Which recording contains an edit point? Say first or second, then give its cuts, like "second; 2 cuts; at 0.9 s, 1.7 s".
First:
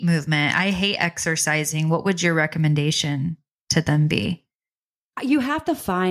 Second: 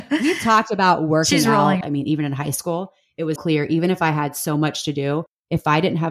second; 2 cuts; at 1.8 s, 3.4 s